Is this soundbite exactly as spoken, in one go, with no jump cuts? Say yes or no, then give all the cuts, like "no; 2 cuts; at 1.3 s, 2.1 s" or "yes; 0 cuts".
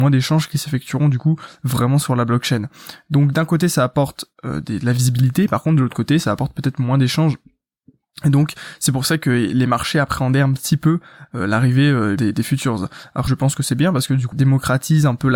no; 3 cuts; at 12.2 s, 13.3 s, 14.3 s